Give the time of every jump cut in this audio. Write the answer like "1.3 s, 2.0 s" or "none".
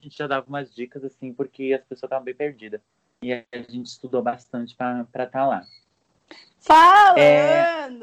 none